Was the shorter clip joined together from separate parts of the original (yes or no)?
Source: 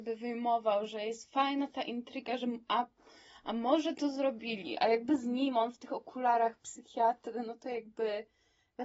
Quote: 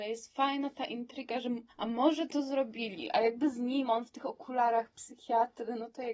yes